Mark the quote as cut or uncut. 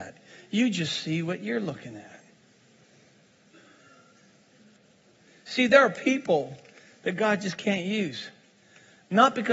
uncut